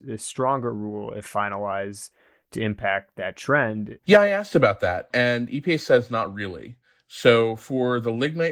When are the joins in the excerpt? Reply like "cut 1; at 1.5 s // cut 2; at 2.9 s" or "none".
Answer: cut 1; at 4.0 s